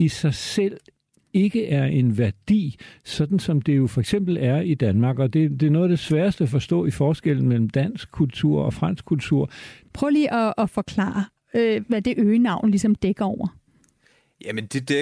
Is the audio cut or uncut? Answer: cut